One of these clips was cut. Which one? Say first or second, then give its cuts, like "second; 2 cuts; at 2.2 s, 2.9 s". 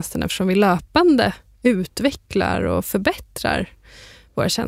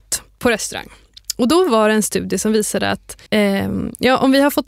second; 1 cut; at 3.3 s